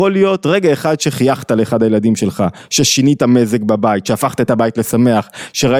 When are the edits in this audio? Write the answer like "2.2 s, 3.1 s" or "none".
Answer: none